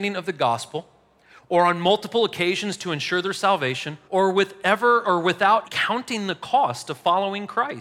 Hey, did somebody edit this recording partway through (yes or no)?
yes